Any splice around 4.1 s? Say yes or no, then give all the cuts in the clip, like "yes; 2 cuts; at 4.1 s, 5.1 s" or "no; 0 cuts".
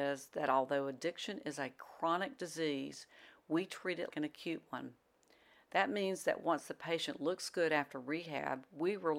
yes; 1 cut; at 4.1 s